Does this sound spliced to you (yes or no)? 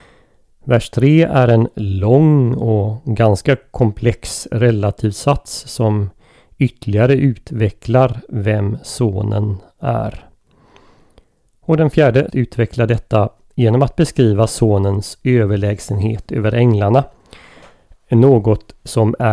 yes